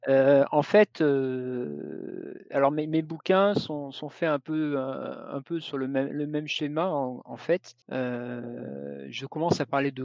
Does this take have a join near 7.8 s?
yes; 1 cut; at 7.8 s

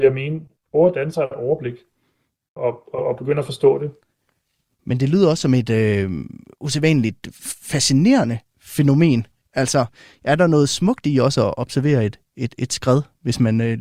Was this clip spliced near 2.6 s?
yes; 1 cut; at 2.6 s

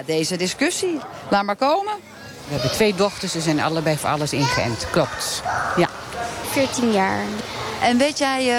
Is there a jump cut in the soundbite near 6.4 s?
yes; 1 cut; at 6.4 s

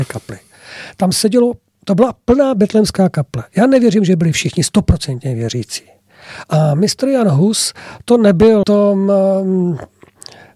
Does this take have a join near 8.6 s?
yes; 1 cut; at 8.6 s

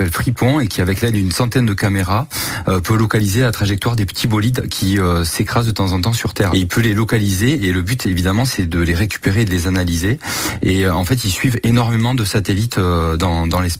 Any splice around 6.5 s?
yes; 1 cut; at 6.5 s

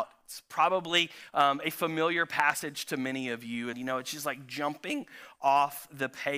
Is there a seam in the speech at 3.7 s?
yes; 1 cut; at 3.7 s

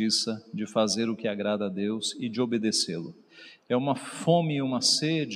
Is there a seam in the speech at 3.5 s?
no; 0 cuts

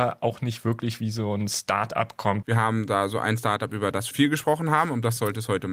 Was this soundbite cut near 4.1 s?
yes; 2 cuts; at 2.4 s, 4.1 s

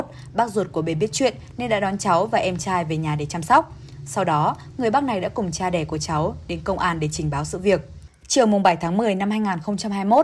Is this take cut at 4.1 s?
no; 0 cuts

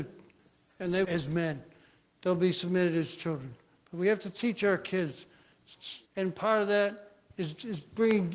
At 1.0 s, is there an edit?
yes; 2 cuts; at 1.0 s, 6.1 s

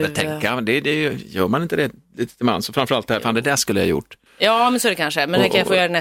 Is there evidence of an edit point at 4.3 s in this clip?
yes; 1 cut; at 4.3 s

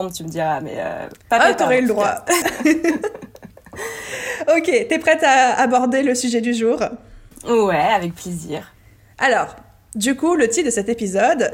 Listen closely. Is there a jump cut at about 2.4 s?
yes; 1 cut; at 2.4 s

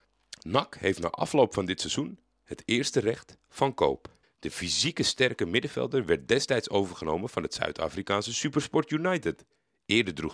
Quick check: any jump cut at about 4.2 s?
yes; 1 cut; at 4.2 s

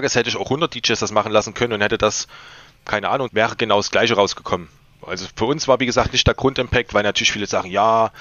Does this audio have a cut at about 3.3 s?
yes; 1 cut; at 3.3 s

